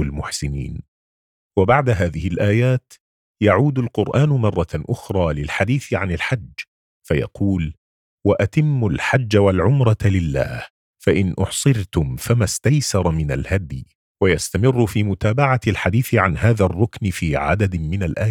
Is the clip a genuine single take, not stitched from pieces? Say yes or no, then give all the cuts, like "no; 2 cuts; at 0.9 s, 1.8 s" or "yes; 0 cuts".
no; 1 cut; at 14.1 s